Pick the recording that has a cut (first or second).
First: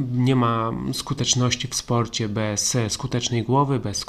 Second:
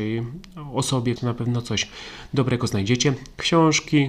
second